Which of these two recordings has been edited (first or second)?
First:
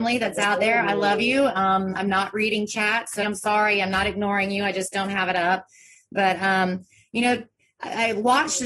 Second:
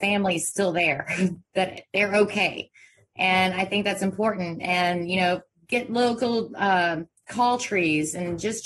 first